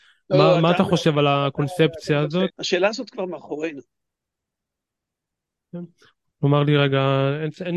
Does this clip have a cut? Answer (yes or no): yes